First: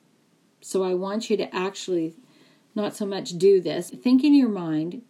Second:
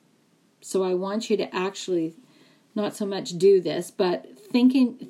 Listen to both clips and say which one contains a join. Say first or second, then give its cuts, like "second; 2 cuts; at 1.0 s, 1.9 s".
first; 1 cut; at 3.9 s